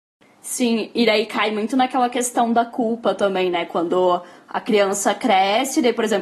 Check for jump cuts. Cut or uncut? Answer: uncut